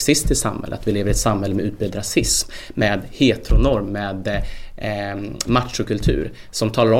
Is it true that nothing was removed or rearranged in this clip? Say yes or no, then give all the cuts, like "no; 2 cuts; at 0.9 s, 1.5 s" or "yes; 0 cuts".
yes; 0 cuts